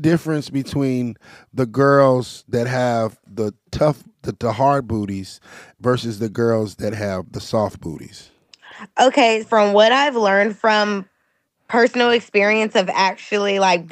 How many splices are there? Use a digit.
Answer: 1